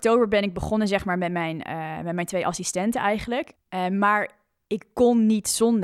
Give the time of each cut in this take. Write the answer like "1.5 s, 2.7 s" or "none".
3.6 s